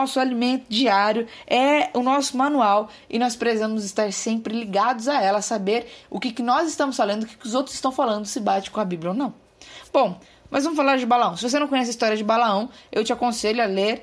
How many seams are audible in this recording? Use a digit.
0